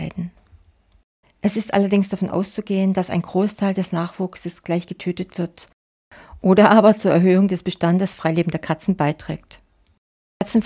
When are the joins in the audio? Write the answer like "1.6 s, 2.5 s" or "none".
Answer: 1.2 s